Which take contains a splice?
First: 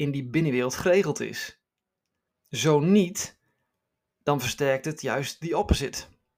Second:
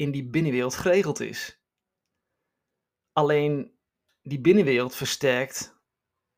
first; 1 cut; at 2.3 s

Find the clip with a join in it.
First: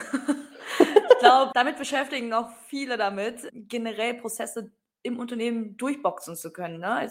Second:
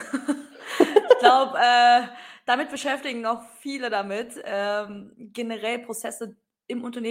first; 2 cuts; at 1.5 s, 3.5 s

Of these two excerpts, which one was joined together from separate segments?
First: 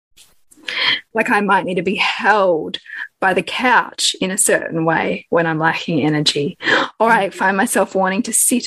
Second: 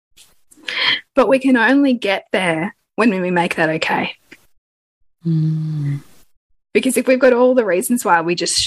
first; 1 cut; at 1.1 s

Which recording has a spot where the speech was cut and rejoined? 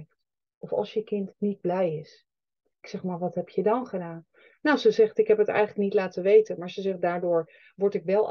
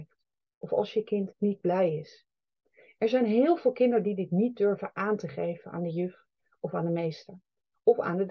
first; 1 cut; at 2.7 s

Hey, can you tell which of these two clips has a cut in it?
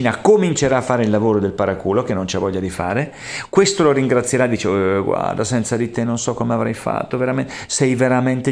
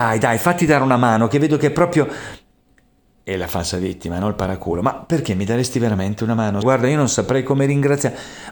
second; 1 cut; at 6.6 s

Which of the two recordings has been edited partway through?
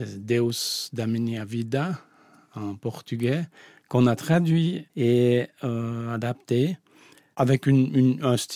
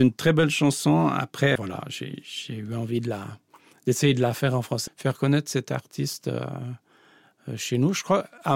second; 2 cuts; at 1.6 s, 4.9 s

